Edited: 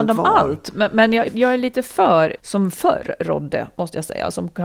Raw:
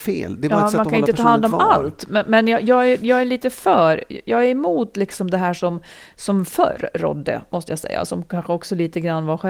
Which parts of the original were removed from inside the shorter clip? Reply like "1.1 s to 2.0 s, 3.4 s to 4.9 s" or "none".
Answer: 2.6 s to 2.9 s, 4.1 s to 6.1 s